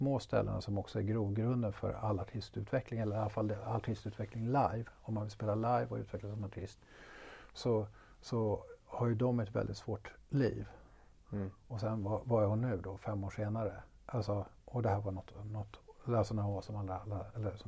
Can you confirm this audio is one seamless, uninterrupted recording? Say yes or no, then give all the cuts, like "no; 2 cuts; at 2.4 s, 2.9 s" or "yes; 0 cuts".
no; 1 cut; at 11.2 s